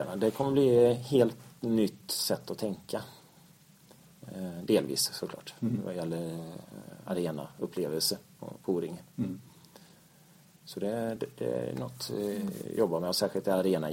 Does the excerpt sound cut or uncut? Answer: uncut